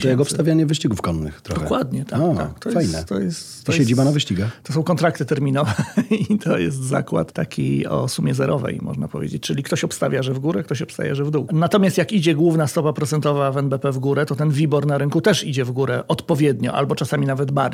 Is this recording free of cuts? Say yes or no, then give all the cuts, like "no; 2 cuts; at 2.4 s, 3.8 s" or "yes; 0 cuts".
no; 1 cut; at 11.5 s